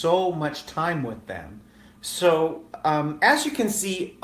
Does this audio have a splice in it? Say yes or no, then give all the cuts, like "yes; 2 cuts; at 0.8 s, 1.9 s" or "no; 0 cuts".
yes; 1 cut; at 2.0 s